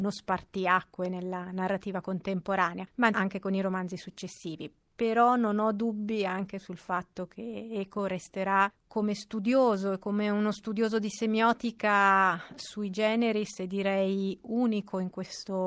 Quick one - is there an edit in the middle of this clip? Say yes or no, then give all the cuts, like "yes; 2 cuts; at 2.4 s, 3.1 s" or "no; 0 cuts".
no; 0 cuts